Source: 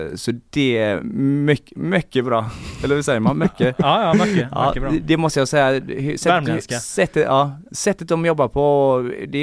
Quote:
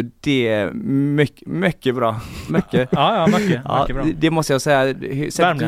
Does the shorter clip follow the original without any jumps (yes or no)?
no